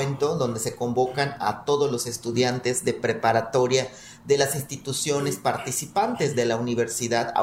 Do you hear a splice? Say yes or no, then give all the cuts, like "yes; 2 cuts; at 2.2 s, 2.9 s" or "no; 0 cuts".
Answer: no; 0 cuts